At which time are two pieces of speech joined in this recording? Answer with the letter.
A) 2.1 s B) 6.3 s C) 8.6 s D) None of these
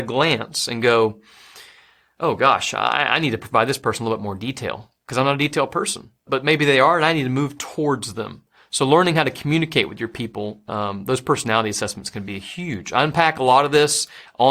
B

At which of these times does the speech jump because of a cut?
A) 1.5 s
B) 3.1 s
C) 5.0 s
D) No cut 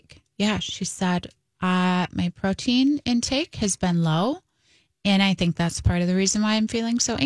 D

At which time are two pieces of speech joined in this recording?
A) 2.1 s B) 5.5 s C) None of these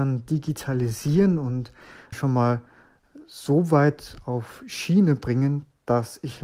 A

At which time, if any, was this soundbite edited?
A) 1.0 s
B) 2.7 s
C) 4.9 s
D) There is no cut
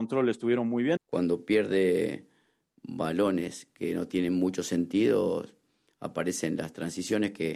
A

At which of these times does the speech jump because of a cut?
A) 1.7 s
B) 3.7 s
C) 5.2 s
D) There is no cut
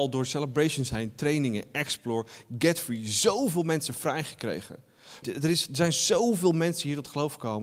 C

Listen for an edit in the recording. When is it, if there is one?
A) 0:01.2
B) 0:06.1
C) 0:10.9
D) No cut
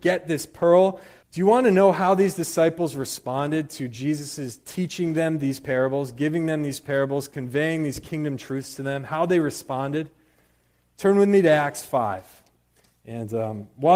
A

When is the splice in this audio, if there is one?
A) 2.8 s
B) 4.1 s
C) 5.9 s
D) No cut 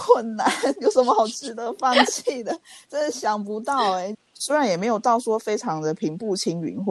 B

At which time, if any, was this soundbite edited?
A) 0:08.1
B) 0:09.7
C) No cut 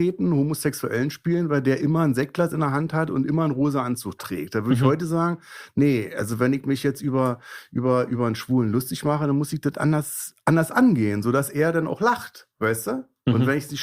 C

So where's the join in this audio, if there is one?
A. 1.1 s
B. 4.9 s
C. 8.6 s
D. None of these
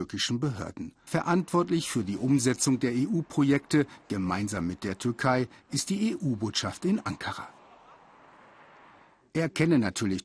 A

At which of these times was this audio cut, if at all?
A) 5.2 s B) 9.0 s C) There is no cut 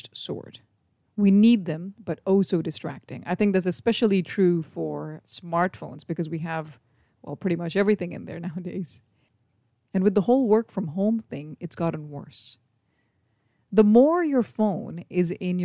A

